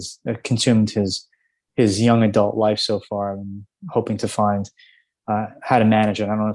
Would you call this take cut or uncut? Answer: uncut